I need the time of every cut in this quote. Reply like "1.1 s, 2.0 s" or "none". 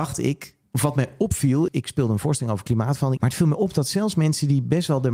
1.7 s, 3.2 s